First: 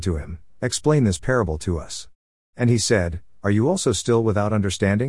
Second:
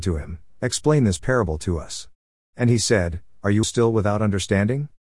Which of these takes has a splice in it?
second; 1 cut; at 3.6 s

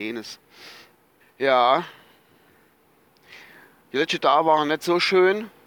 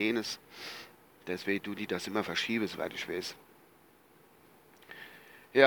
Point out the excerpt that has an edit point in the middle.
first; 1 cut; at 1.2 s

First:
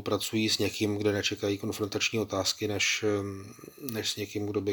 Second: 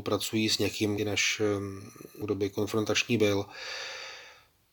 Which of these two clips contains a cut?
second; 2 cuts; at 1.0 s, 2.2 s

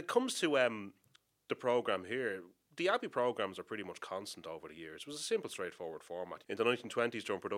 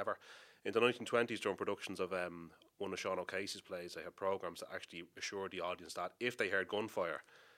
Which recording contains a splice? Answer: first; 1 cut; at 6.4 s

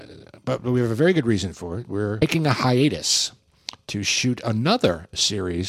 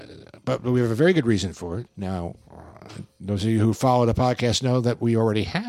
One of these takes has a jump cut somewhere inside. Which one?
second; 1 cut; at 1.9 s

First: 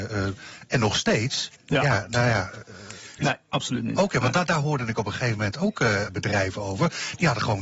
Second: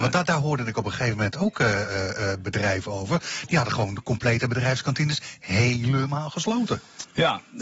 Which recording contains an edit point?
first; 3 cuts; at 1.6 s, 3.2 s, 6.1 s

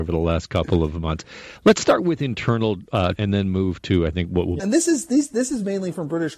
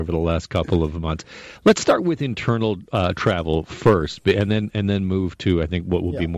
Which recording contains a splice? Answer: first; 2 cuts; at 3.2 s, 4.6 s

